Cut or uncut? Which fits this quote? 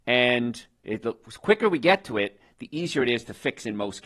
uncut